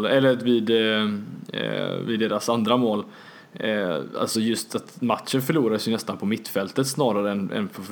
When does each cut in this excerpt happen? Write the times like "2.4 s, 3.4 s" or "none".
none